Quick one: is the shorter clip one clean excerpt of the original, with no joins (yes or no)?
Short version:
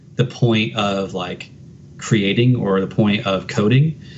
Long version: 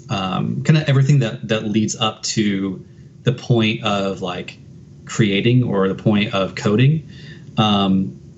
yes